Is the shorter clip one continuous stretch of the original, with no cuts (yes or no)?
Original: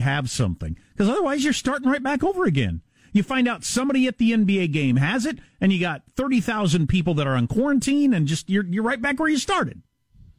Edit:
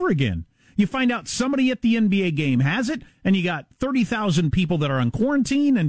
yes